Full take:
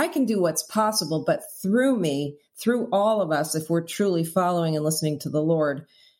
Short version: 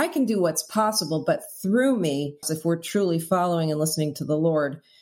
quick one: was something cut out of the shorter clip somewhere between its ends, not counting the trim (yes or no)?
yes